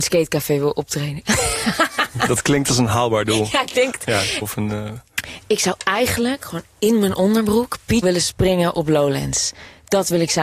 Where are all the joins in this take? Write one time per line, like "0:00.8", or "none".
0:04.4
0:08.0